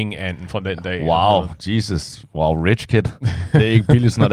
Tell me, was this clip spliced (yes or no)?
no